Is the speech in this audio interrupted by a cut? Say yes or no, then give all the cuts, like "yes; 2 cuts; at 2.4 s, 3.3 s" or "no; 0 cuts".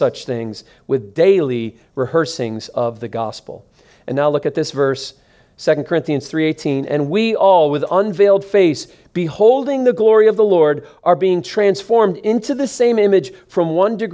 no; 0 cuts